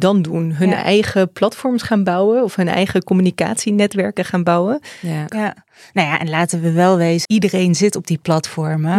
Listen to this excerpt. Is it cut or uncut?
cut